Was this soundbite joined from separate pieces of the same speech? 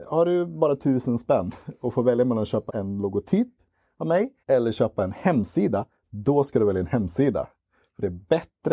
yes; 2 cuts; at 2.7 s, 4.4 s

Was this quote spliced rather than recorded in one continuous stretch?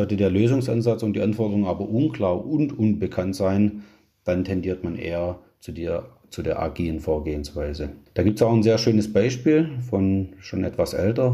no; 0 cuts

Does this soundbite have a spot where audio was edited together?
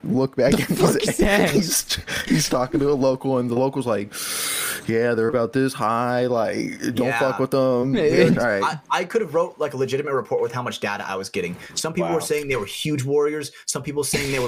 yes; 1 cut; at 8.3 s

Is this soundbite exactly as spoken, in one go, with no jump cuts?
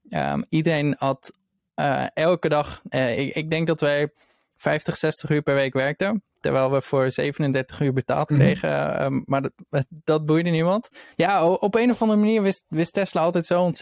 no; 1 cut; at 11.1 s

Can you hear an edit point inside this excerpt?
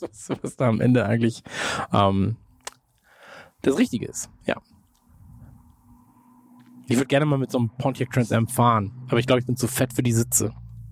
no; 0 cuts

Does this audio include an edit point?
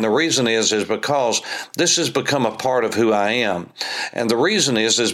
no; 0 cuts

